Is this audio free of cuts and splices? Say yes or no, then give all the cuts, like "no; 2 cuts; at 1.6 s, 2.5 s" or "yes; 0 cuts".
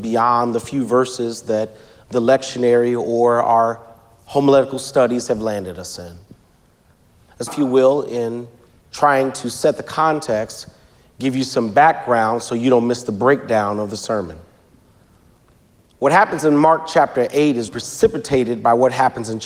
no; 2 cuts; at 7.5 s, 17.7 s